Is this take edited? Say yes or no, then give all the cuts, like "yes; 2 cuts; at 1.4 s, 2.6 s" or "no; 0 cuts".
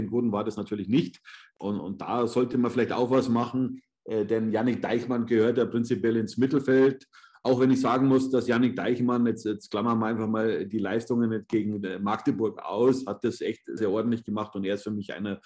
yes; 2 cuts; at 1.8 s, 13.8 s